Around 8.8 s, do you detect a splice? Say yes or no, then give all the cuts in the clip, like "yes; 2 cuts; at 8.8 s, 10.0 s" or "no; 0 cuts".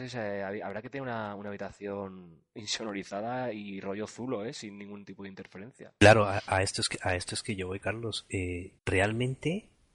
yes; 1 cut; at 8.8 s